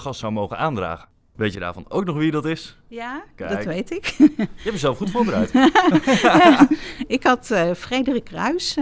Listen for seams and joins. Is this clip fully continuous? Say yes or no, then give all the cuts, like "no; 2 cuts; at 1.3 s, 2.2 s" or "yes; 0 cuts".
yes; 0 cuts